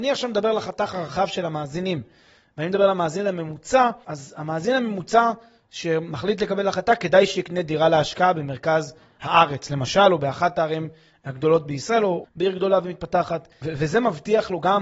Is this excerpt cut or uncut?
cut